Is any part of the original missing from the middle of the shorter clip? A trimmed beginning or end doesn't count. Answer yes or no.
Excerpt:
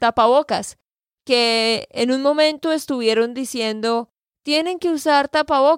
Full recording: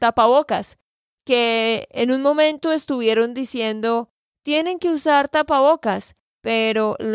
no